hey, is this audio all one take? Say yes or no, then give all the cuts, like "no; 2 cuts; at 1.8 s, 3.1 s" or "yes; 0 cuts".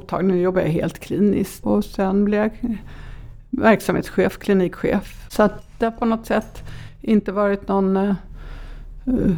no; 2 cuts; at 1.6 s, 5.3 s